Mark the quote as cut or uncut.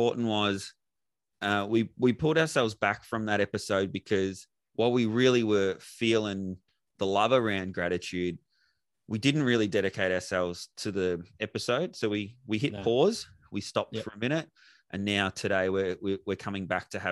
uncut